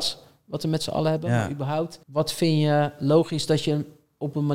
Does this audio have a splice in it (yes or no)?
yes